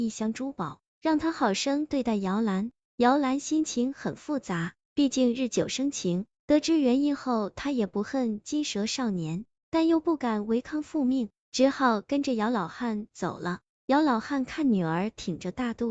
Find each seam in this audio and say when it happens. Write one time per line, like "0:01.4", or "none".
none